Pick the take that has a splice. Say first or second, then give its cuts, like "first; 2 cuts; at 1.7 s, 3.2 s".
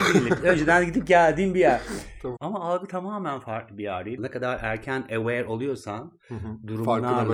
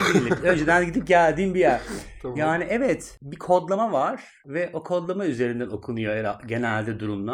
first; 2 cuts; at 2.4 s, 4.2 s